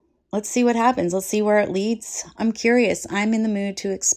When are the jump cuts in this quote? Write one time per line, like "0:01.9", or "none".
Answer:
0:02.3